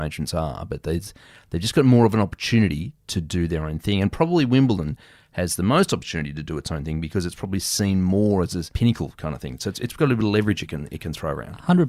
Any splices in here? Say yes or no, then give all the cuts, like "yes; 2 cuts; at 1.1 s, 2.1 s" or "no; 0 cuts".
no; 0 cuts